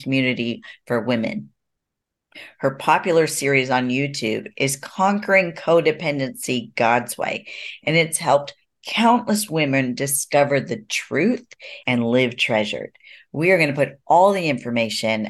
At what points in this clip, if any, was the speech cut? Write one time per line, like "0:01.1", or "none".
0:11.8

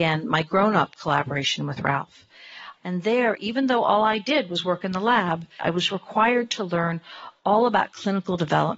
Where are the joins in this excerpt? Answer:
0:02.8
0:05.6

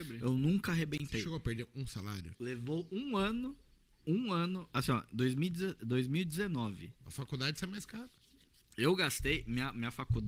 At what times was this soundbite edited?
0:02.3
0:07.0

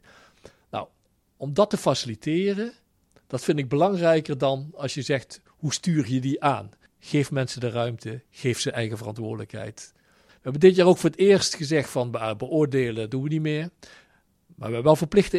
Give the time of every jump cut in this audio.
none

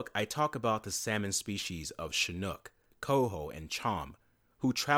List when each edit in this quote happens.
0:02.9

